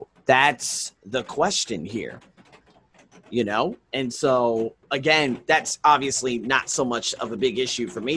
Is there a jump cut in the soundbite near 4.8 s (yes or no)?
yes